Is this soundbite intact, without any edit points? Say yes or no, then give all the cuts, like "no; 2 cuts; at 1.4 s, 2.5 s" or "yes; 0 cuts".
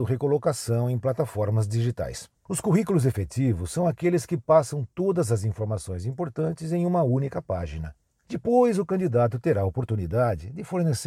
no; 1 cut; at 2.3 s